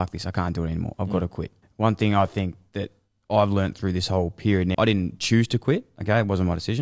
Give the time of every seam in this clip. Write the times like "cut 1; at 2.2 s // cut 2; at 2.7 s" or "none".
cut 1; at 1.6 s // cut 2; at 4.7 s